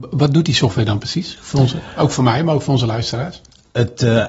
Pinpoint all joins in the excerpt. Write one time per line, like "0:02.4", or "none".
none